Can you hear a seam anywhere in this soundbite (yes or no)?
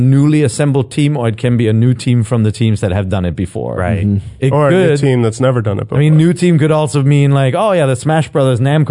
no